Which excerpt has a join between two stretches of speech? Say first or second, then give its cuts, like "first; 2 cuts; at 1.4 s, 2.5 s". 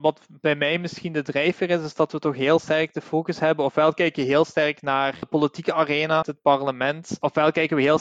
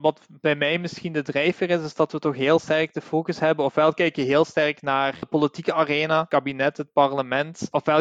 first; 1 cut; at 6.2 s